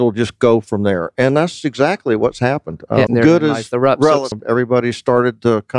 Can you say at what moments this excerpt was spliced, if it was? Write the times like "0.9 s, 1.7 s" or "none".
3.1 s, 4.3 s

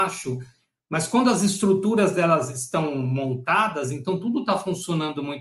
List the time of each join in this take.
none

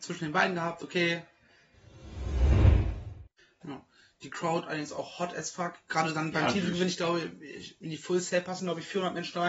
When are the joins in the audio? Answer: 3.6 s

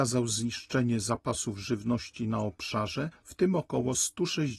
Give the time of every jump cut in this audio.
3.2 s

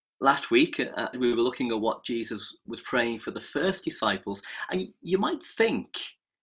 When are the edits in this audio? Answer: 1.1 s

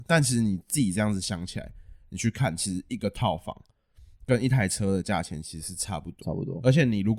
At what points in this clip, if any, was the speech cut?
6.2 s

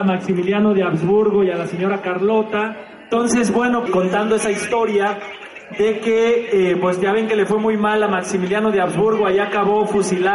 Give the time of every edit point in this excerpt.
3.9 s

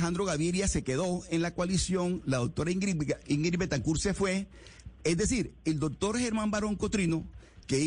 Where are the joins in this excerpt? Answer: 5.0 s

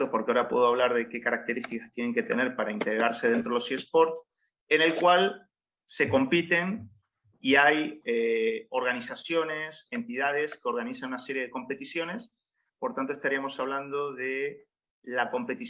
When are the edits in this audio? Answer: none

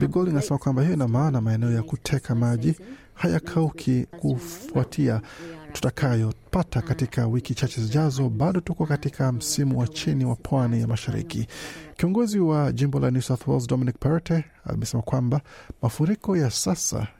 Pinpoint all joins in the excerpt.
4.1 s, 11.9 s

